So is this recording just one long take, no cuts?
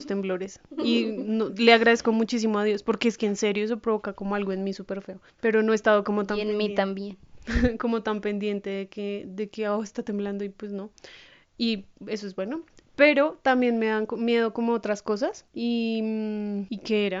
no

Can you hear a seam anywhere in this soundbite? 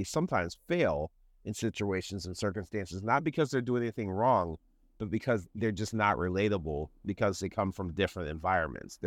no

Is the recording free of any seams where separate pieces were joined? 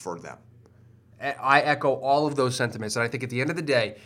no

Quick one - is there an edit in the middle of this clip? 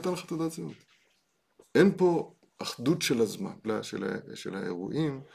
yes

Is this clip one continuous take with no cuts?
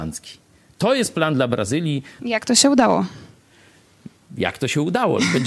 no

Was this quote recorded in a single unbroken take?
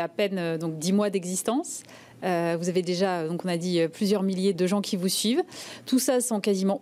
no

